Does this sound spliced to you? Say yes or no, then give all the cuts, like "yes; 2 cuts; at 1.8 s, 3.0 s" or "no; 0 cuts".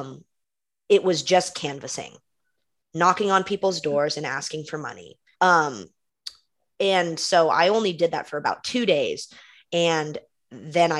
yes; 1 cut; at 5.3 s